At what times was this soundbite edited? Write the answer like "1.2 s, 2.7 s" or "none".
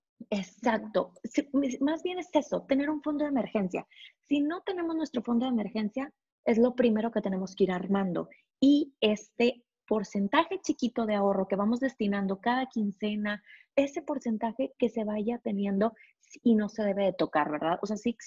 13.7 s